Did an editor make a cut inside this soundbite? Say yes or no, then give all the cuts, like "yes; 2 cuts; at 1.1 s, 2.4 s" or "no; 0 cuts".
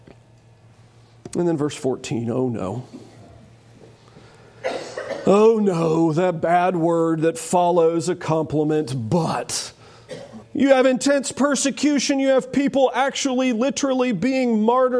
yes; 1 cut; at 10.4 s